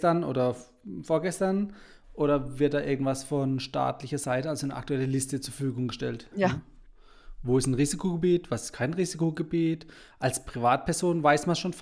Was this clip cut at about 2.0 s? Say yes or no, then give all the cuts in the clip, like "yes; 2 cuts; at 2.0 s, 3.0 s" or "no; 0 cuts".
yes; 2 cuts; at 2.0 s, 6.3 s